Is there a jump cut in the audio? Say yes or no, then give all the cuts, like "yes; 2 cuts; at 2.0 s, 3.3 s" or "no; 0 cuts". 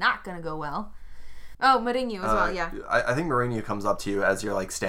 yes; 1 cut; at 1.5 s